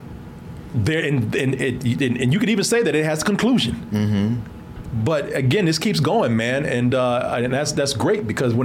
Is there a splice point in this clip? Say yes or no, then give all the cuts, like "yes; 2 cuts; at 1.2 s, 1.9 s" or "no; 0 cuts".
no; 0 cuts